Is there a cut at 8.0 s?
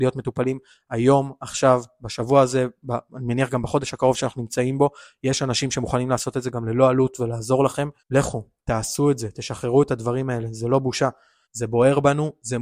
yes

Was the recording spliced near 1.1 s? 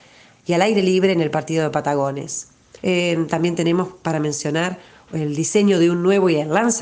no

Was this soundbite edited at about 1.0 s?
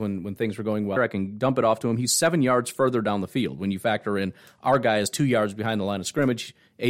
yes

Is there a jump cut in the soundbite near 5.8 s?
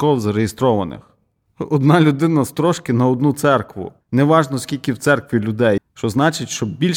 yes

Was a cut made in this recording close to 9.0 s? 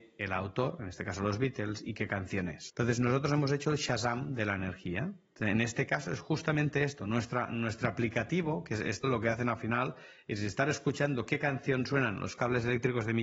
yes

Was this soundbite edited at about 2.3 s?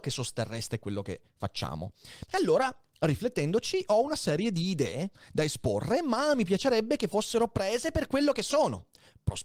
yes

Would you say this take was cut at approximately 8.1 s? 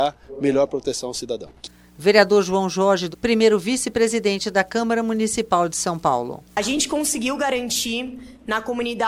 no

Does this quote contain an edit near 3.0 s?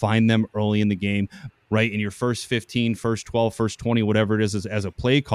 no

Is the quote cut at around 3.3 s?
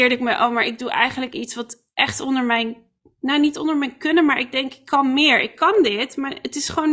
no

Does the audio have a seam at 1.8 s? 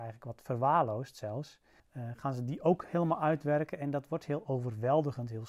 yes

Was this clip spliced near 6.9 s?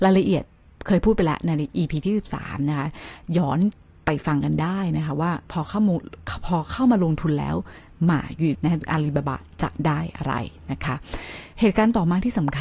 no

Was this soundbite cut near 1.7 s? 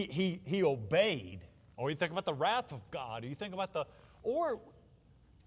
yes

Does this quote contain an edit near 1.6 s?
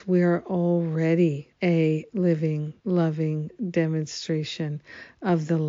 yes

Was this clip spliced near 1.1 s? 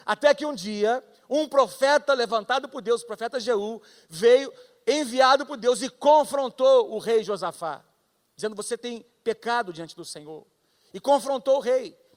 no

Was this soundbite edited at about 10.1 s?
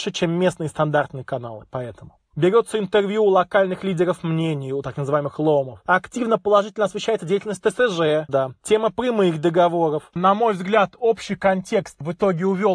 yes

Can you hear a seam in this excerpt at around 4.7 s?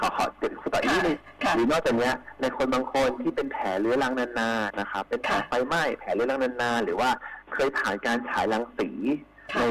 yes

